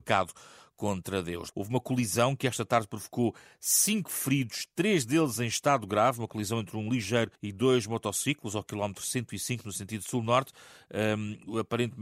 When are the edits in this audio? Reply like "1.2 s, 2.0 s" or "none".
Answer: 1.5 s, 7.4 s